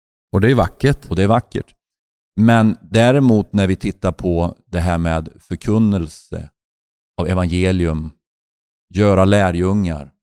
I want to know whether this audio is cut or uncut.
uncut